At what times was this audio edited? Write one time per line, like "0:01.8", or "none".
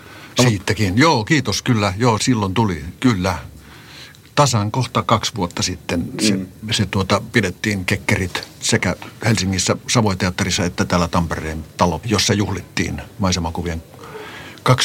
0:02.2
0:12.0